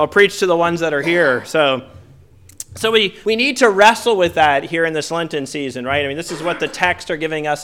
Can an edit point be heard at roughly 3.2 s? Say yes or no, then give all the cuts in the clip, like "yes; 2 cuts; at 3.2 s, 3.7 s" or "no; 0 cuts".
yes; 1 cut; at 3.2 s